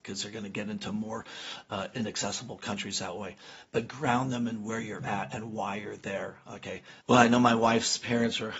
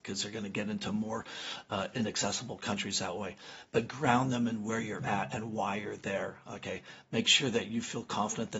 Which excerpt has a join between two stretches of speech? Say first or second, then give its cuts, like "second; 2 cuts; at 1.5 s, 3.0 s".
first; 1 cut; at 7.0 s